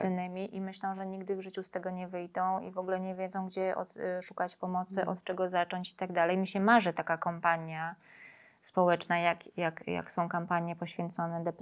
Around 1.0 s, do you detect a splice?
no; 0 cuts

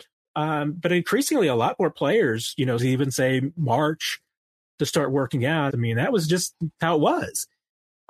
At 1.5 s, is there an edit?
no; 2 cuts; at 2.8 s, 5.7 s

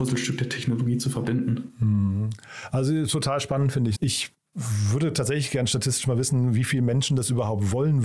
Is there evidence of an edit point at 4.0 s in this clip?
yes; 1 cut; at 4.0 s

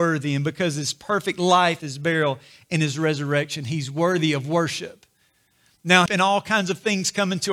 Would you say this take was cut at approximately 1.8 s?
yes; 2 cuts; at 1.8 s, 6.1 s

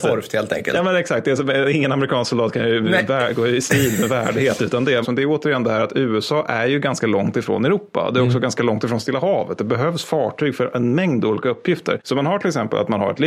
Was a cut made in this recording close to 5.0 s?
yes; 1 cut; at 5.0 s

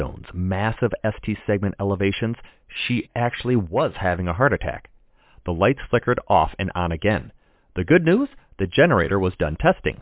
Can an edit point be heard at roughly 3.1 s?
no; 0 cuts

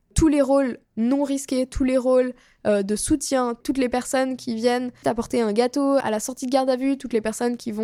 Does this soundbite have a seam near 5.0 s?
yes; 1 cut; at 5.0 s

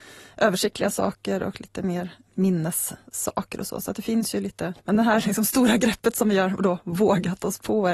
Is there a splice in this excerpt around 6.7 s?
no; 1 cut; at 4.8 s

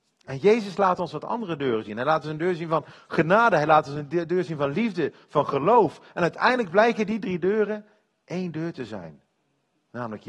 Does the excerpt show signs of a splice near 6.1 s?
no; 0 cuts

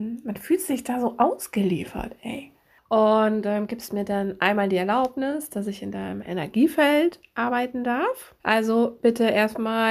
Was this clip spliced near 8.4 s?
yes; 2 cuts; at 2.8 s, 8.4 s

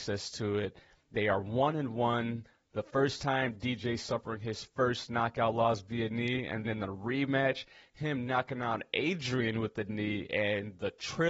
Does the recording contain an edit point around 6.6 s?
yes; 1 cut; at 6.6 s

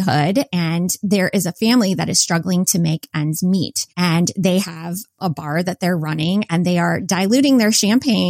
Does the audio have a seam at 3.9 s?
yes; 1 cut; at 3.9 s

